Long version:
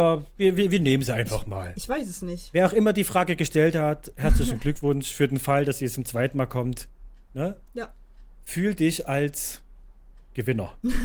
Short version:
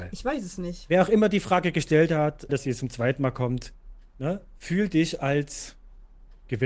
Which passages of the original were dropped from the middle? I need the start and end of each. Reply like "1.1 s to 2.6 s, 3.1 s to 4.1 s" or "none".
4.1 s to 5.6 s, 7.6 s to 8.4 s